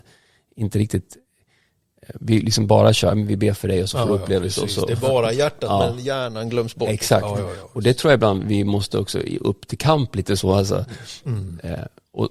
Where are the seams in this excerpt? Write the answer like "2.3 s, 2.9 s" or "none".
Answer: none